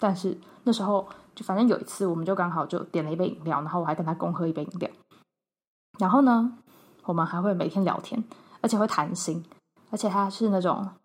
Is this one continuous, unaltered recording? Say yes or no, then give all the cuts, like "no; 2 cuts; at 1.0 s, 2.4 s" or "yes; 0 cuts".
yes; 0 cuts